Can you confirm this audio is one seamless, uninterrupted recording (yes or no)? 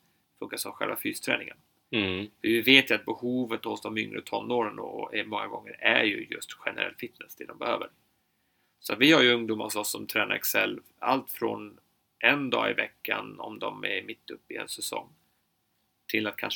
yes